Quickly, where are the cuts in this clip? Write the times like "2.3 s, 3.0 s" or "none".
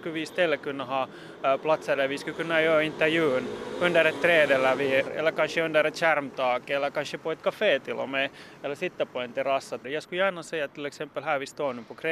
5.1 s, 9.8 s

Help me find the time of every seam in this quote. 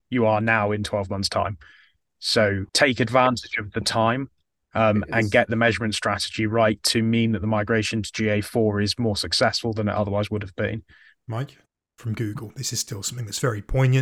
2.7 s, 11.8 s

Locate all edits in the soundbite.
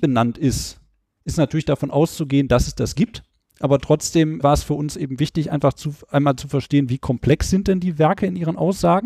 4.4 s

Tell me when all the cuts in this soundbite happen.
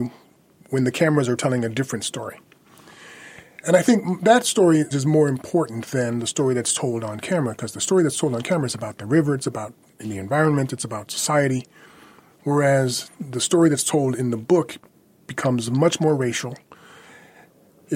4.9 s

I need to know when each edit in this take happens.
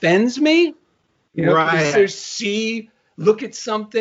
1.9 s

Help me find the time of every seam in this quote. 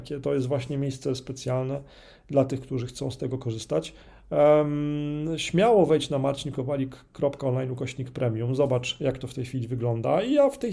none

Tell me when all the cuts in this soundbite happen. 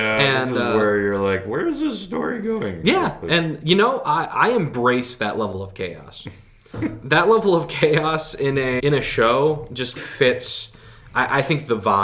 8.8 s, 10.0 s

